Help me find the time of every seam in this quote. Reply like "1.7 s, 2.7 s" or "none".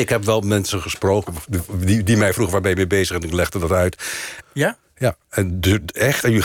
4.4 s